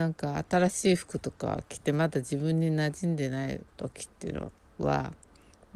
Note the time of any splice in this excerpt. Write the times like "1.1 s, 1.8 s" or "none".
3.7 s